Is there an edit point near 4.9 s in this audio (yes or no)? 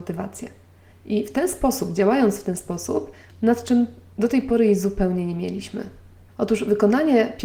no